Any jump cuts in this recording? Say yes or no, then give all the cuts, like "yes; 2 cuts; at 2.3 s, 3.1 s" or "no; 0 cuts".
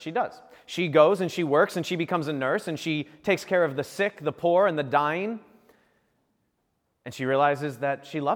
no; 0 cuts